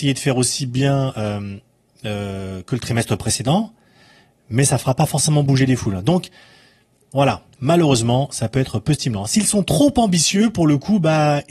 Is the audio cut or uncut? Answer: cut